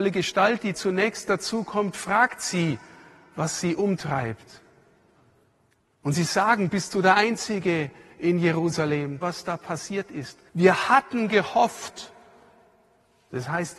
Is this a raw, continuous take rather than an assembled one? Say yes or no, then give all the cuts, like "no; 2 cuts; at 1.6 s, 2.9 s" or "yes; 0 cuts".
no; 2 cuts; at 9.2 s, 10.5 s